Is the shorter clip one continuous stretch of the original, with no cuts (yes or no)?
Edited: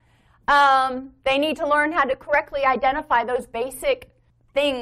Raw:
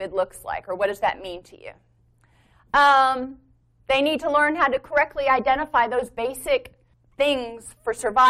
no